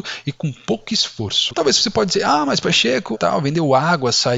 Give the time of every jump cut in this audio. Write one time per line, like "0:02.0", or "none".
0:01.5
0:03.1